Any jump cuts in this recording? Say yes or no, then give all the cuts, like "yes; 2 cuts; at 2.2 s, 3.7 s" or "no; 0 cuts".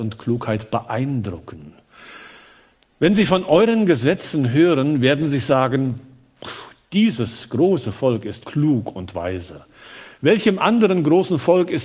yes; 1 cut; at 8.4 s